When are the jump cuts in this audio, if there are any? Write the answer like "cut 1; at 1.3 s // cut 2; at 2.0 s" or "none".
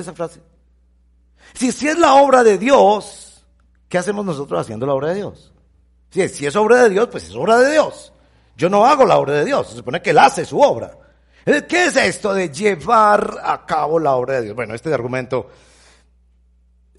none